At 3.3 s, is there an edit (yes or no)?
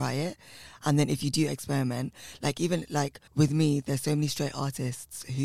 yes